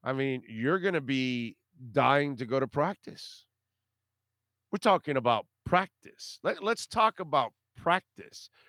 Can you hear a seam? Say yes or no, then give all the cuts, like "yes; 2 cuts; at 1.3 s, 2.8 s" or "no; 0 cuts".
no; 0 cuts